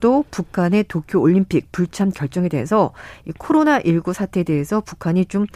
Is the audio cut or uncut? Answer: uncut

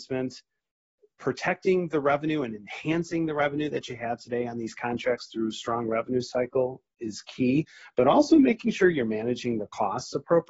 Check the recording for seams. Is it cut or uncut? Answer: uncut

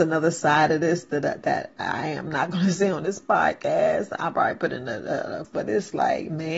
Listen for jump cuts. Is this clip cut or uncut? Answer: cut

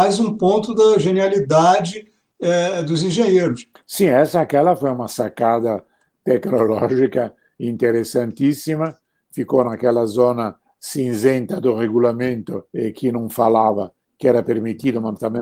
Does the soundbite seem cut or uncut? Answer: cut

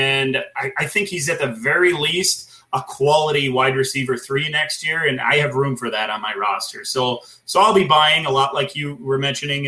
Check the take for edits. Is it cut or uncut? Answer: uncut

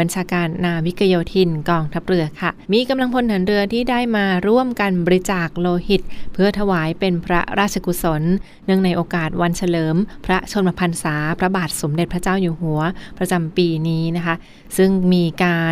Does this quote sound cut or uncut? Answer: cut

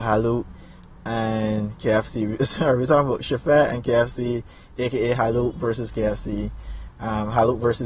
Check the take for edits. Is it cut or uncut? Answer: uncut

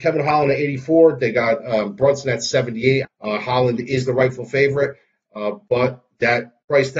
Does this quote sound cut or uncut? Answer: cut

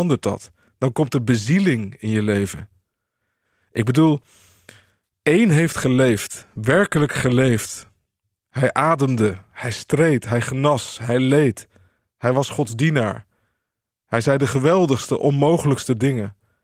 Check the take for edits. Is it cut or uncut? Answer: uncut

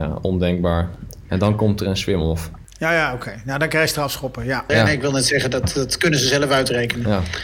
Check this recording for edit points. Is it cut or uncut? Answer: cut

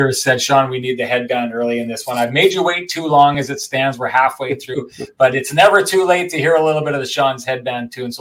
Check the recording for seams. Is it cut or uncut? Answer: uncut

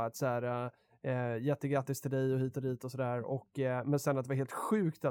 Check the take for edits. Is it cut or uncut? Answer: uncut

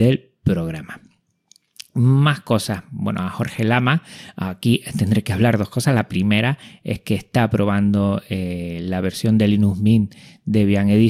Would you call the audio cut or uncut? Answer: uncut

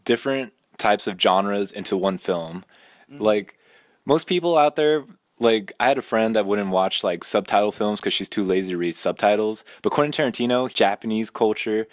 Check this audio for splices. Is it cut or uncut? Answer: cut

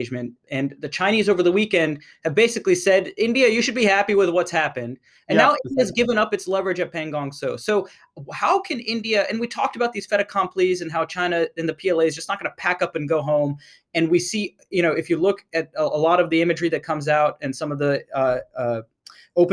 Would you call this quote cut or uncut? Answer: uncut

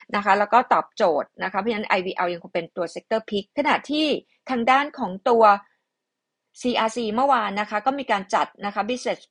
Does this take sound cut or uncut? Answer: cut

